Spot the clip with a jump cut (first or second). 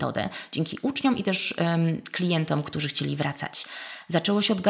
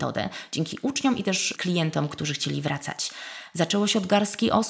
second